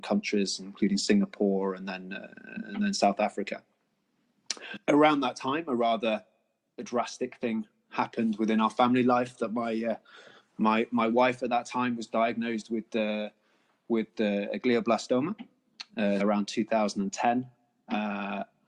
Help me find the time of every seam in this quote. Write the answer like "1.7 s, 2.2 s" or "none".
16.2 s

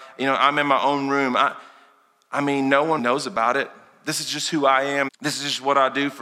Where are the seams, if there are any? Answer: 3.0 s, 5.1 s

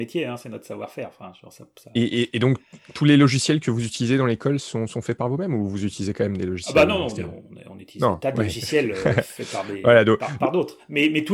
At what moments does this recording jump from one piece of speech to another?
none

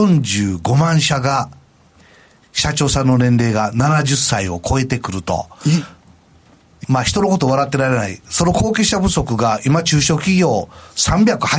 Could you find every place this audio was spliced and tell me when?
2.0 s, 6.8 s, 8.2 s

